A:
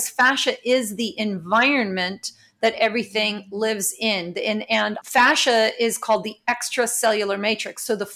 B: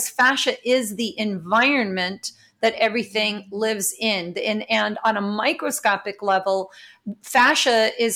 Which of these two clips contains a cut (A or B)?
A